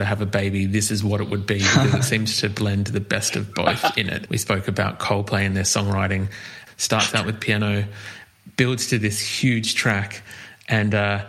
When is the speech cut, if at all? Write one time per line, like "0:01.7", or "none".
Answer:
0:04.3
0:06.7